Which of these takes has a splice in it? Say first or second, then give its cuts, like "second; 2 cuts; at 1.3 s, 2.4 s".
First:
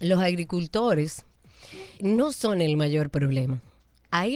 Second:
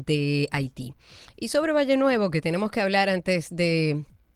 first; 1 cut; at 2.0 s